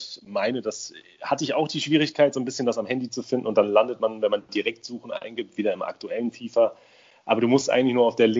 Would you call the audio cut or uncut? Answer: uncut